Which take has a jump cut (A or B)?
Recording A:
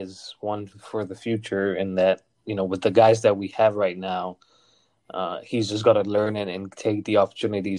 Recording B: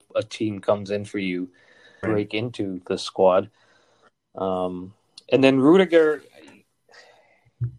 B